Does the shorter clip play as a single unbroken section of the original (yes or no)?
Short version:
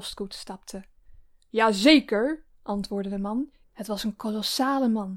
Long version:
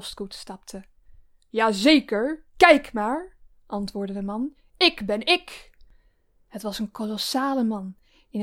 no